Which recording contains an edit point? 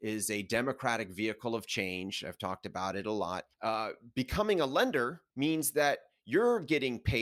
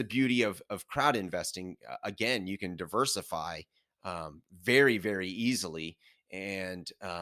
first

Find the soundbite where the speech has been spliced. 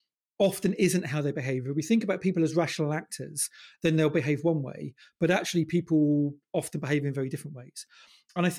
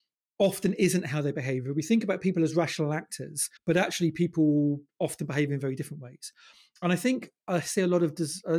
second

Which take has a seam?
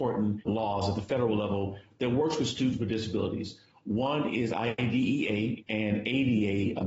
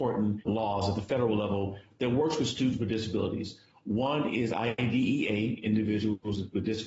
first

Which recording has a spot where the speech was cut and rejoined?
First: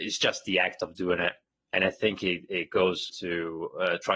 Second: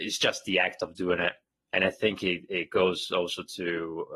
first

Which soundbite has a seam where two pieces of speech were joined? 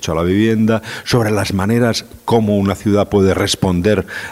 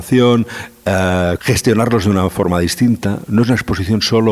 second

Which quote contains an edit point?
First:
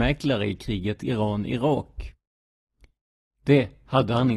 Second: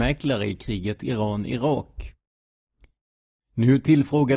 first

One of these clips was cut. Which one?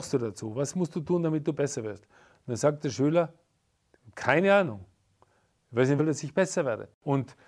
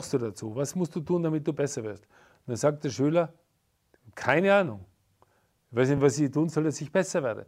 first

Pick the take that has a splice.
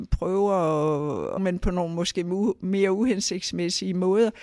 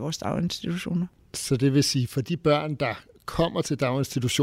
first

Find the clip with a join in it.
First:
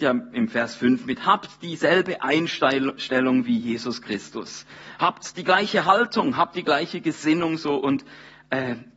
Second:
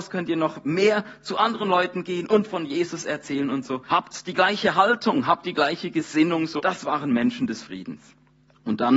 second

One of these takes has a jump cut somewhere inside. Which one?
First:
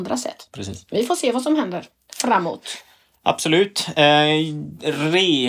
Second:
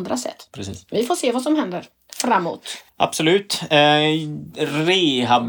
second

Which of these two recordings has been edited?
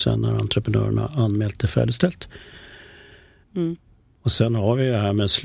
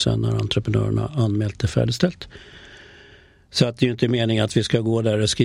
first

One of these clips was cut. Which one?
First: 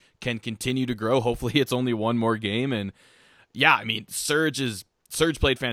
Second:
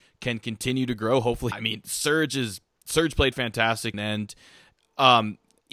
second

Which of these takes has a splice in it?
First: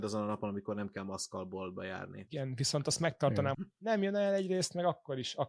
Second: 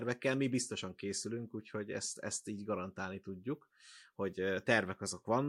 first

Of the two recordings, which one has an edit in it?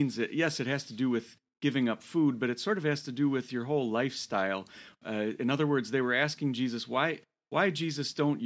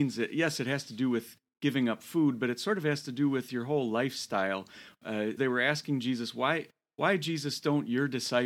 second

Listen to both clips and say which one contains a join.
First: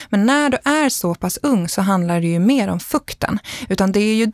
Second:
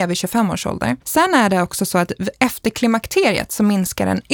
second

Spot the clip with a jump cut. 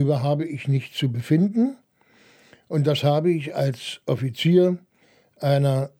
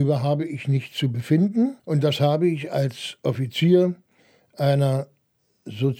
second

